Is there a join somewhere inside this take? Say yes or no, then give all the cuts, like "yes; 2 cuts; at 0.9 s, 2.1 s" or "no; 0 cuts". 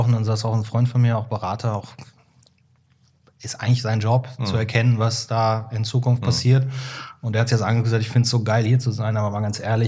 no; 0 cuts